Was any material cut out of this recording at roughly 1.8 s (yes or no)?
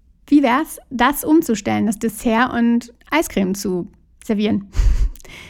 no